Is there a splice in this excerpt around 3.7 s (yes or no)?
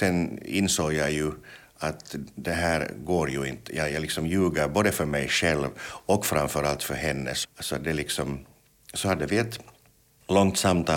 no